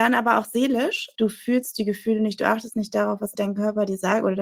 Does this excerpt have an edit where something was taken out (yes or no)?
yes